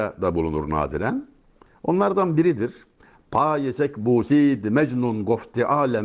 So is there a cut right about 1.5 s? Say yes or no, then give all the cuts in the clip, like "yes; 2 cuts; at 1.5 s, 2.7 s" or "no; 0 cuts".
no; 0 cuts